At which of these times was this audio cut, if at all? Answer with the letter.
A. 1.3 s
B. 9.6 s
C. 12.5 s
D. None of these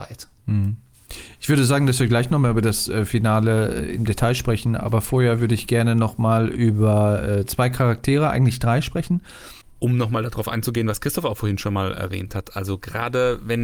B